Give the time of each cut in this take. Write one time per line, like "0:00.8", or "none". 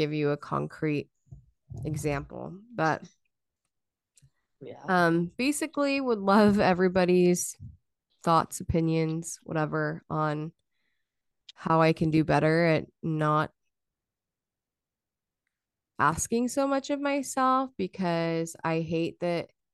none